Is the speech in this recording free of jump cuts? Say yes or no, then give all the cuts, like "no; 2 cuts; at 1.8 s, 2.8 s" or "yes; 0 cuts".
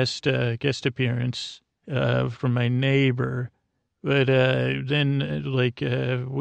yes; 0 cuts